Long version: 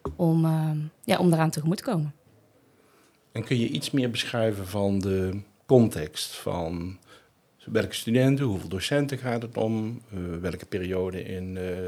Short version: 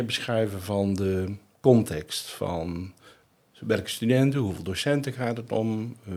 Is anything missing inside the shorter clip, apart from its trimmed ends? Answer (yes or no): no